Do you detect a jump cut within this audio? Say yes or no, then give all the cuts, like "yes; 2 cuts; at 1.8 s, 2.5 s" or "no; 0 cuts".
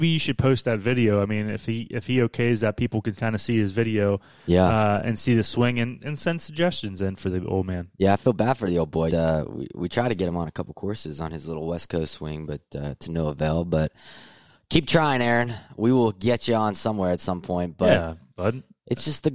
yes; 1 cut; at 9.1 s